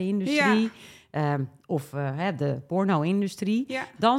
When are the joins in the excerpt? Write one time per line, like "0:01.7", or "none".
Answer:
none

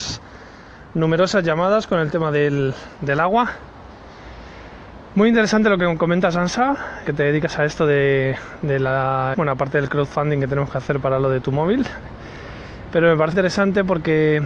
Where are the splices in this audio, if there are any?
0:07.0
0:09.3
0:13.3

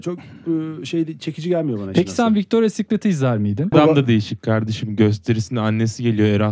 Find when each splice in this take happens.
0:03.7

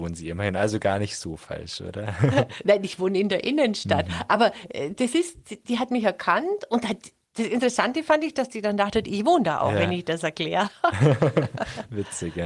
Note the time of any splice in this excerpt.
none

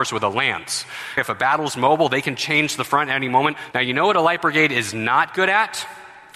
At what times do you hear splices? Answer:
0:01.2
0:03.7

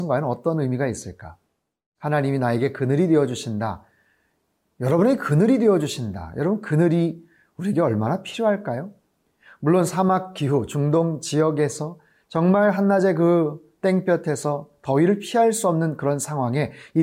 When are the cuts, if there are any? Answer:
none

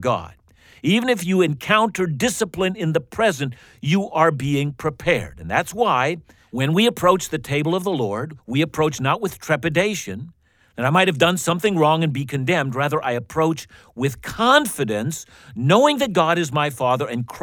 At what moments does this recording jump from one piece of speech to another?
none

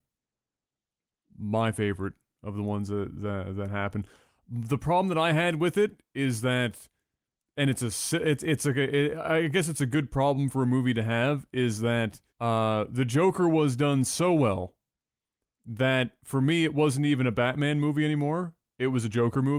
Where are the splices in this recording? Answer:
0:12.3

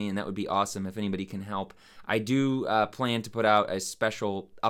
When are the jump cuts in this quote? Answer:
none

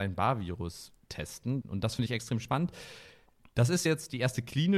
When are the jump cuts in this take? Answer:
0:01.6

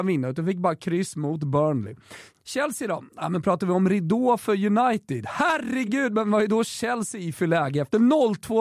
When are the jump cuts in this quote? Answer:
none

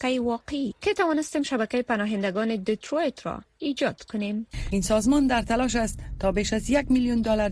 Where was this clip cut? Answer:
0:04.7

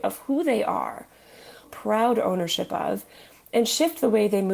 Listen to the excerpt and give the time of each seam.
0:01.6

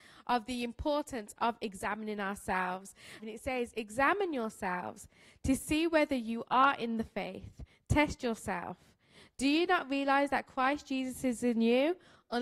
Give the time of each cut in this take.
0:03.2

